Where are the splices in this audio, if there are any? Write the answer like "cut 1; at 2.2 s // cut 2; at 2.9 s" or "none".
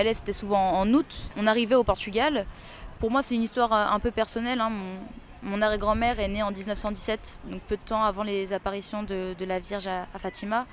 cut 1; at 3.0 s